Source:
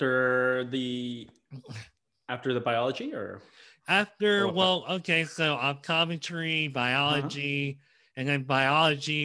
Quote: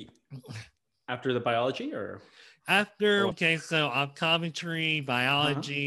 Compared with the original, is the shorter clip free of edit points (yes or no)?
no